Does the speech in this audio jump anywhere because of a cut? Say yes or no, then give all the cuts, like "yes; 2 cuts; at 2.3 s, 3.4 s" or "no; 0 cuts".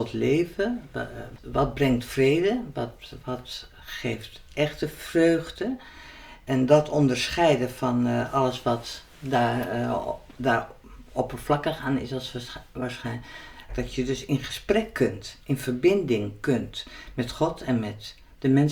yes; 1 cut; at 13.7 s